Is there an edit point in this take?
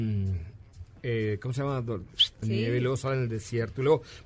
yes; 1 cut; at 2.4 s

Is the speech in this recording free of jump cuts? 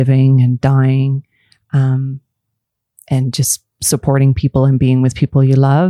yes; 0 cuts

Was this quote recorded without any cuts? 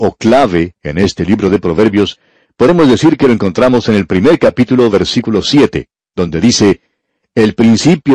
yes; 0 cuts

